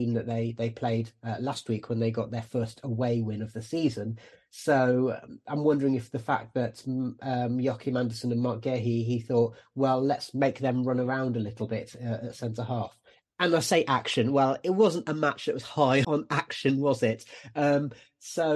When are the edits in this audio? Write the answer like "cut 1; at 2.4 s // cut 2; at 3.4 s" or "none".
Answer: cut 1; at 13.2 s // cut 2; at 16.0 s